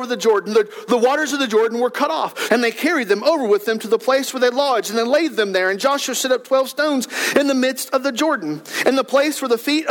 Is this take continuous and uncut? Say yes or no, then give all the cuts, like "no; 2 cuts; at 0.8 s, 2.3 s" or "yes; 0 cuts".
no; 1 cut; at 2.5 s